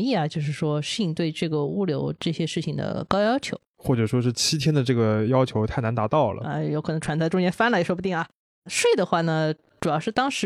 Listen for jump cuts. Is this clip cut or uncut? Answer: cut